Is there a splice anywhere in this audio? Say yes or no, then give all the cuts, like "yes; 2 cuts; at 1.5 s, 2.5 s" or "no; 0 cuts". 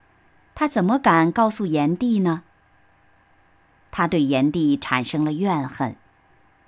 no; 0 cuts